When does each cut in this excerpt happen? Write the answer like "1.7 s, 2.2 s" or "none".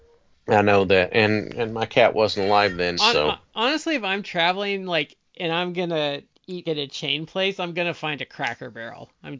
3.0 s, 6.6 s